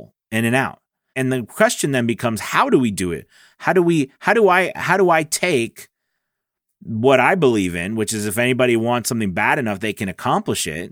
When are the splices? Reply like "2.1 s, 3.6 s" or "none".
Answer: 1.1 s